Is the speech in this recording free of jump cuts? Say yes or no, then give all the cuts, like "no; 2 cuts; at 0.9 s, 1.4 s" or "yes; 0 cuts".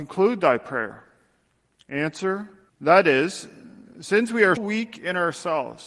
no; 2 cuts; at 2.7 s, 4.6 s